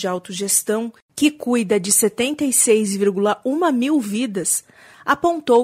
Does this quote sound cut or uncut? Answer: uncut